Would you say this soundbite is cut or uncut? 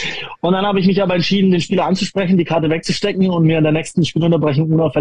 uncut